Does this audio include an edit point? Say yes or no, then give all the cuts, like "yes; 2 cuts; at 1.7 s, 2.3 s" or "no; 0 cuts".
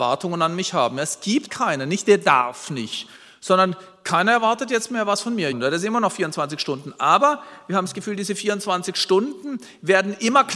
yes; 2 cuts; at 1.5 s, 5.5 s